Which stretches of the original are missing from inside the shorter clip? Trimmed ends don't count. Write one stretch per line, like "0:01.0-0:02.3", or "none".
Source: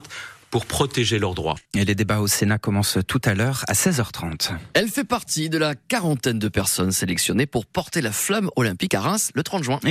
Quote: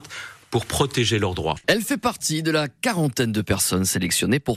0:01.6-0:04.7